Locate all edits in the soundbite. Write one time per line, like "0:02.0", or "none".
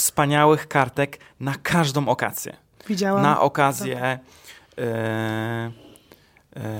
none